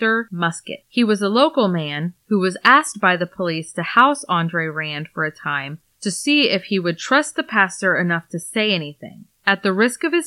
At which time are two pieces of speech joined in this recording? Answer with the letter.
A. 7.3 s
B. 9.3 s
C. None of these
B